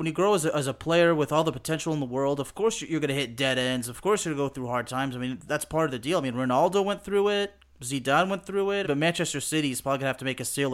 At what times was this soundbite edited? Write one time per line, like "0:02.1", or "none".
0:05.5
0:08.8